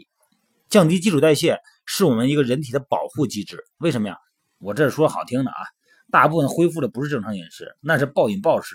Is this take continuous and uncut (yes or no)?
no